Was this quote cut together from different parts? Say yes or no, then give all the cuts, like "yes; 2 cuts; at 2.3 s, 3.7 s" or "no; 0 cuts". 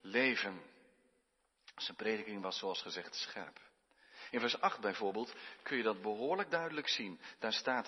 no; 0 cuts